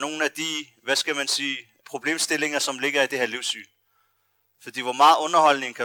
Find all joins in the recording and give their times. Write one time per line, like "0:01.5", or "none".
0:01.8
0:04.5